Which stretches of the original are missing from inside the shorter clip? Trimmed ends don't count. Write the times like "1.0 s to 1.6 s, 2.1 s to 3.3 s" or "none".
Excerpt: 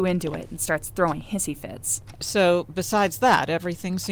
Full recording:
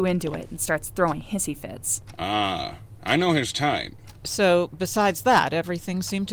2.2 s to 4.2 s